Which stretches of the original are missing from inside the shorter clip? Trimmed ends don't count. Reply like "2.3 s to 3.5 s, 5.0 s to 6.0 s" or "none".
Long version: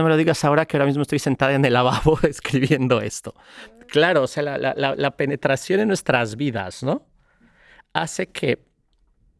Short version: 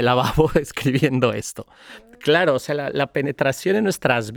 4.6 s to 5.0 s